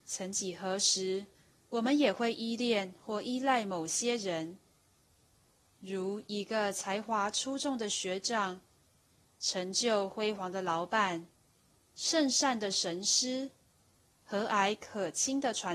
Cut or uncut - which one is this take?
uncut